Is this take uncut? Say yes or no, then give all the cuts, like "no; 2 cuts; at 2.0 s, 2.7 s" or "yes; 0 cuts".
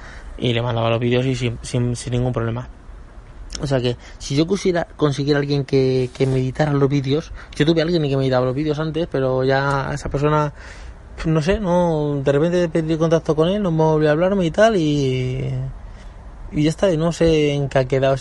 yes; 0 cuts